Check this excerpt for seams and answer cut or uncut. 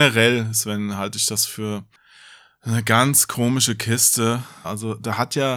cut